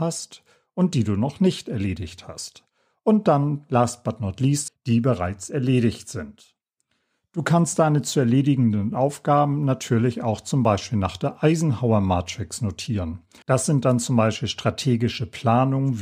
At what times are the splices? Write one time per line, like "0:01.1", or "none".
0:04.7
0:13.4